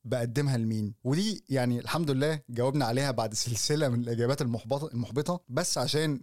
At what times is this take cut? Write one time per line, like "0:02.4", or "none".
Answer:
none